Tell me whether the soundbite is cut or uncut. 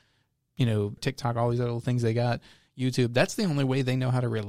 cut